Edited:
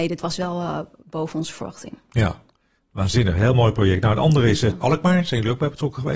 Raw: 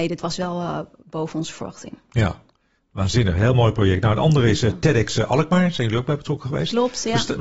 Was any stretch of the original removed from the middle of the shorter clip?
yes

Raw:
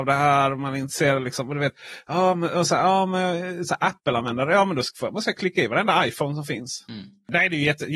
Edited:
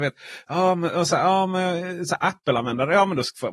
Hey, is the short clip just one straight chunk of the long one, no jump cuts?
yes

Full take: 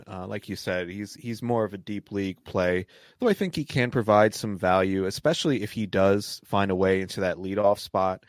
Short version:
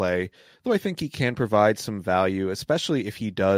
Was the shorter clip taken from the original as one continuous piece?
yes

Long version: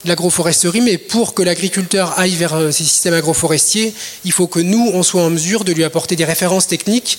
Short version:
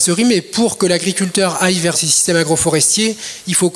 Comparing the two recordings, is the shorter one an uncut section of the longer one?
no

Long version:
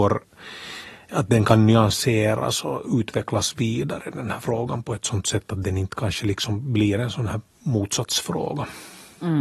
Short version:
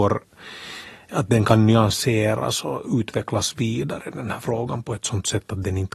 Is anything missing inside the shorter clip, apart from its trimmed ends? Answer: no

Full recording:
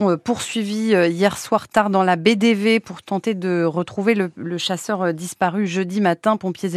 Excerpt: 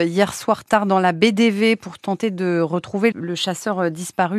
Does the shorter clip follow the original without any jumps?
no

